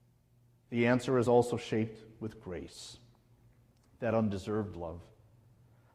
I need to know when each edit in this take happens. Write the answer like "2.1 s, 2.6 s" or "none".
none